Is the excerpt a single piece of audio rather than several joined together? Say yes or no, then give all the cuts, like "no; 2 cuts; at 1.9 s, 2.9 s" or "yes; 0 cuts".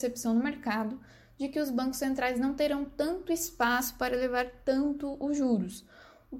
yes; 0 cuts